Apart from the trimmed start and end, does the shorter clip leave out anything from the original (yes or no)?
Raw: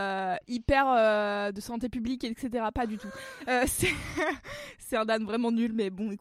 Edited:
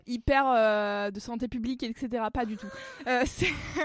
no